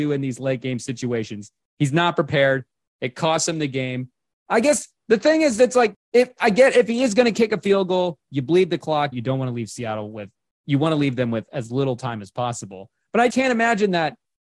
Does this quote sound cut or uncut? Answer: cut